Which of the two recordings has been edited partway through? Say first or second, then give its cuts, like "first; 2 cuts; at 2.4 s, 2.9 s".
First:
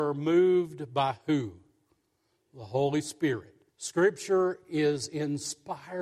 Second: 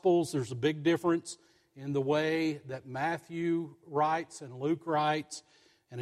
first; 1 cut; at 3.7 s